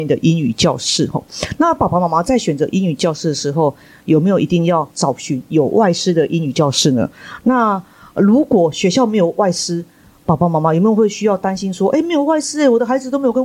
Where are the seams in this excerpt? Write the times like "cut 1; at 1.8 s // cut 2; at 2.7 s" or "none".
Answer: none